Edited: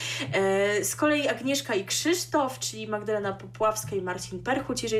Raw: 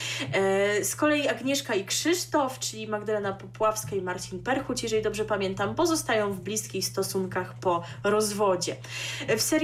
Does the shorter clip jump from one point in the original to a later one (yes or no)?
no